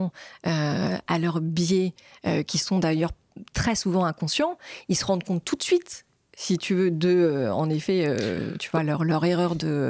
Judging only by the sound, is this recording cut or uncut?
uncut